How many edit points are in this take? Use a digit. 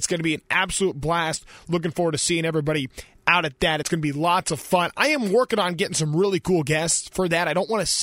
0